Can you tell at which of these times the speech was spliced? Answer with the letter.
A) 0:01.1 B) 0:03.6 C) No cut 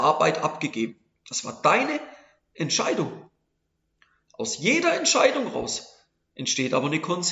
A